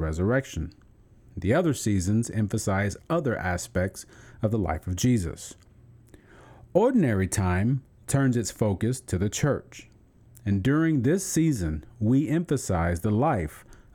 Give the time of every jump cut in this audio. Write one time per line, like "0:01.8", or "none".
none

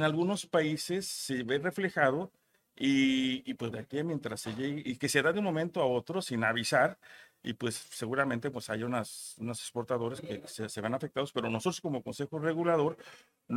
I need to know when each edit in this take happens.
0:03.7

